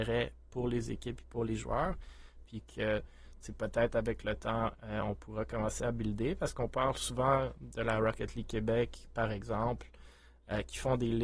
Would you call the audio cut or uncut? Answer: cut